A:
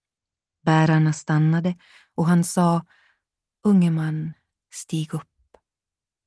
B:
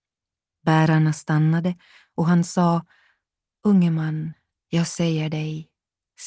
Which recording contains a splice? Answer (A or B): A